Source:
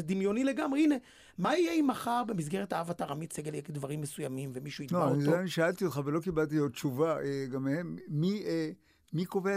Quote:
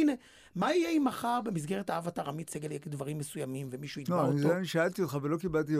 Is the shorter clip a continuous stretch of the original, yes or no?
yes